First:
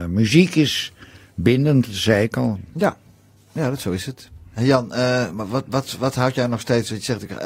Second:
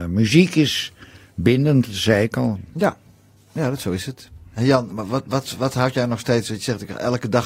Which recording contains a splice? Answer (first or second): second